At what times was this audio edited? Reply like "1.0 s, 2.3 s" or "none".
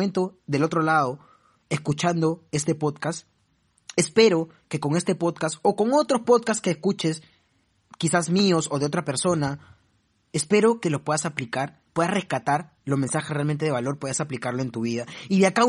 10.8 s, 12.8 s